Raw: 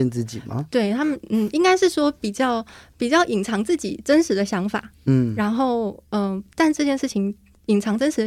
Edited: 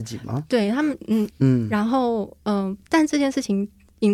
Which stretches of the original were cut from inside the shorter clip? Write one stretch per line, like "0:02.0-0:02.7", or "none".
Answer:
0:01.5-0:05.0